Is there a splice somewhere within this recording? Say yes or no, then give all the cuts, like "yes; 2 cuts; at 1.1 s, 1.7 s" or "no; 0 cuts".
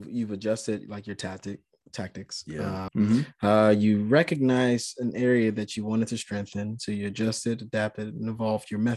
yes; 1 cut; at 2.9 s